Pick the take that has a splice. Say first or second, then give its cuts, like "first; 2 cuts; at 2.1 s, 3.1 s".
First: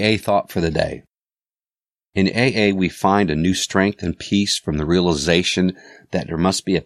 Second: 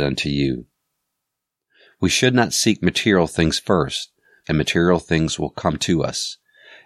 second; 1 cut; at 4.4 s